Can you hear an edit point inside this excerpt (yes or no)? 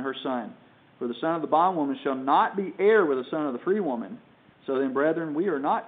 no